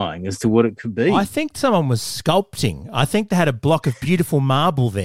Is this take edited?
no; 0 cuts

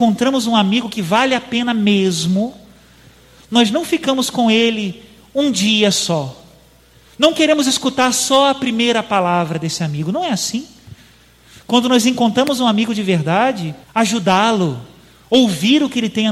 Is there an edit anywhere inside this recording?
yes; 1 cut; at 13.8 s

